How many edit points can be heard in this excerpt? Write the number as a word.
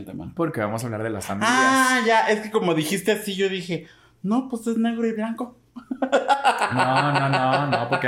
zero